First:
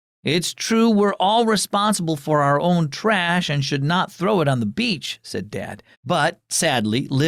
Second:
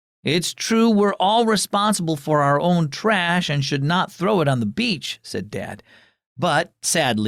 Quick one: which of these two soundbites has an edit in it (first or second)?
first